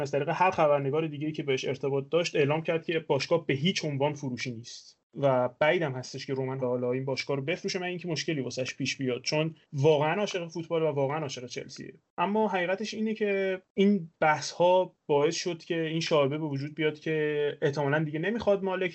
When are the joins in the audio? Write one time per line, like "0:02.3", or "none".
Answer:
0:06.6
0:09.6